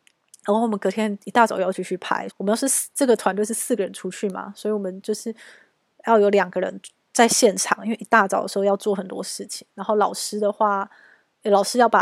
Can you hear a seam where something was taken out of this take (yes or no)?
yes